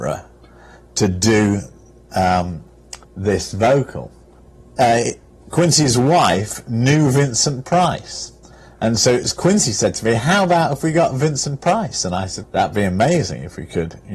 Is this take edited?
yes; 2 cuts; at 3.0 s, 12.4 s

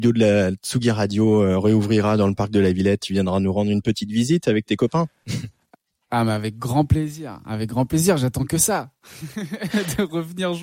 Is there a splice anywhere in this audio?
yes; 1 cut; at 3.0 s

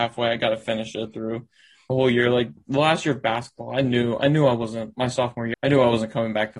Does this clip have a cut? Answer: yes; 2 cuts; at 2.6 s, 5.5 s

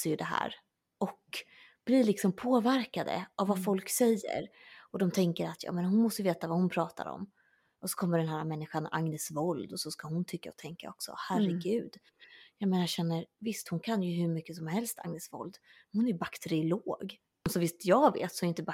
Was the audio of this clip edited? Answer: no; 0 cuts

